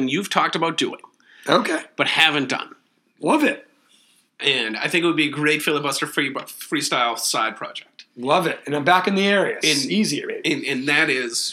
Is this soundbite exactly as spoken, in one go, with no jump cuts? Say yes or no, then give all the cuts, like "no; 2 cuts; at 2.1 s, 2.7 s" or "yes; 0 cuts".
no; 1 cut; at 9.6 s